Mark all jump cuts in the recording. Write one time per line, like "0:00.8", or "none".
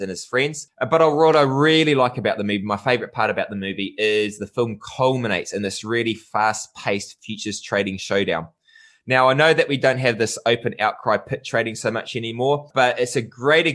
none